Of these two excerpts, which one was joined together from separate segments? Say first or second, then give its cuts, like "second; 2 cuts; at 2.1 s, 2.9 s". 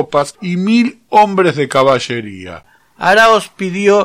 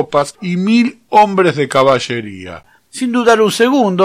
first; 1 cut; at 2.8 s